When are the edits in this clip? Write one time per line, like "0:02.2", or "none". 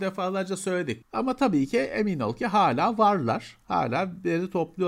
0:01.0